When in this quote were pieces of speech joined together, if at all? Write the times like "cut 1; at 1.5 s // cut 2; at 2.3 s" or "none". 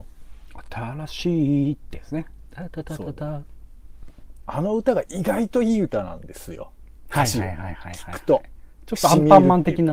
cut 1; at 4.4 s